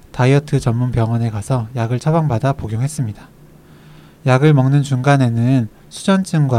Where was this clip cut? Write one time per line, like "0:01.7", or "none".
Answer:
0:04.2